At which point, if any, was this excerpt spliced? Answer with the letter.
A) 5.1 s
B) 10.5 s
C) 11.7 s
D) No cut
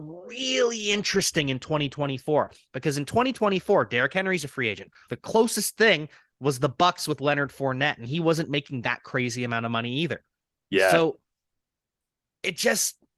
A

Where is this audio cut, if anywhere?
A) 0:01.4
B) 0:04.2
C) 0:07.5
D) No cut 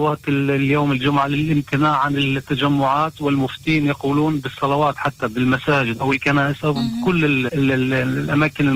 C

